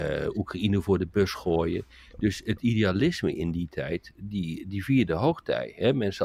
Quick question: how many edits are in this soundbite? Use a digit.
0